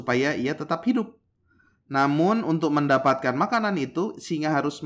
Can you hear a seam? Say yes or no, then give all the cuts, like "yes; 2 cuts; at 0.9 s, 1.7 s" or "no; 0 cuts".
no; 0 cuts